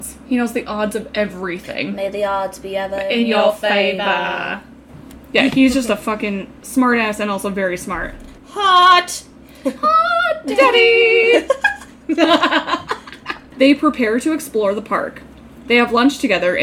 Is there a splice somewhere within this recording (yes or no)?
no